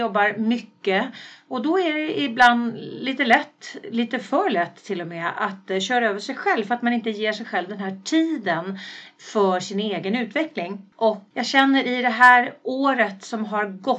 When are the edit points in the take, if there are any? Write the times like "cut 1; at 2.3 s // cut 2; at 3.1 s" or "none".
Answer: cut 1; at 10.9 s